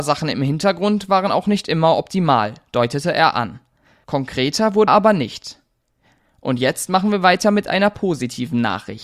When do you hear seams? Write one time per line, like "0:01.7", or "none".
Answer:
0:04.9